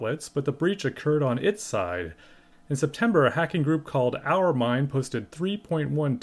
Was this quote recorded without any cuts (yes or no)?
no